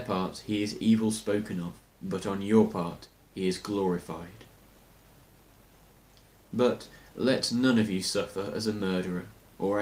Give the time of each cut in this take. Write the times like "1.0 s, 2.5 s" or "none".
1.9 s